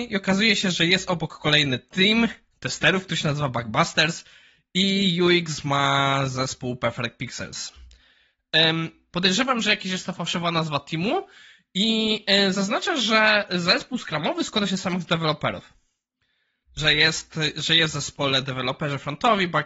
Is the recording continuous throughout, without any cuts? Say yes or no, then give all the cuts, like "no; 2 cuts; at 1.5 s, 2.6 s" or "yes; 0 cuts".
no; 2 cuts; at 9.1 s, 16.7 s